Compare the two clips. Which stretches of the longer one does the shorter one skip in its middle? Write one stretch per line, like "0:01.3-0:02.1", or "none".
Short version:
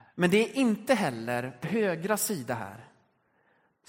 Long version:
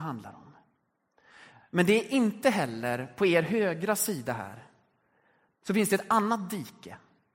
0:03.2-0:03.4

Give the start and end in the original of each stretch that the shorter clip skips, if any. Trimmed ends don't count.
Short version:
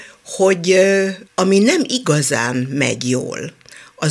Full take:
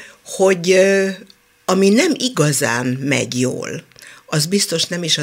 0:01.3-0:01.6

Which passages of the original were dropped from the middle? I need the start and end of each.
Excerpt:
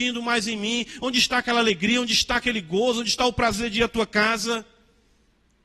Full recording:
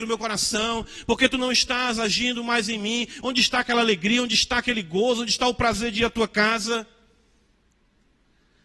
none

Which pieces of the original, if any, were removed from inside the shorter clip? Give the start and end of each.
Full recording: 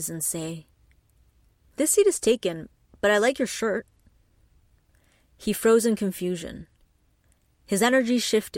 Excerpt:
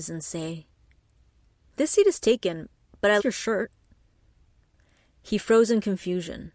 0:03.2-0:03.3

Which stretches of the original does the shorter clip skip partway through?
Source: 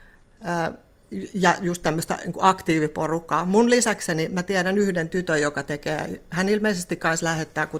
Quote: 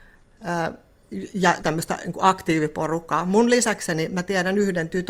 0:01.6-0:01.8

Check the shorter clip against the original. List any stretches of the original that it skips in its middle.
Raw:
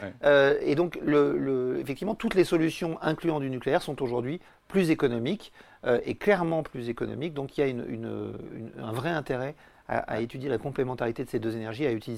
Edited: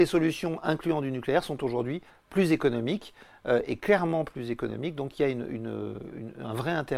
none

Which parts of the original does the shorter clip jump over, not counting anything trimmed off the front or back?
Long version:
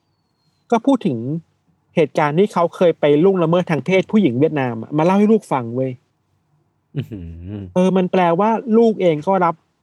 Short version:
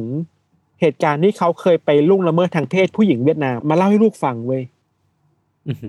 0:04.8-0:04.9

